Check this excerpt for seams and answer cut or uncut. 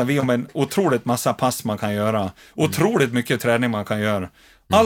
uncut